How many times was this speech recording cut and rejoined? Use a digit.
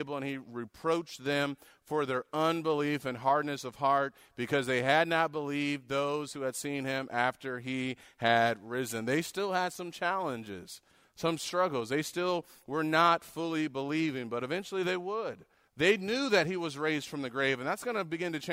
1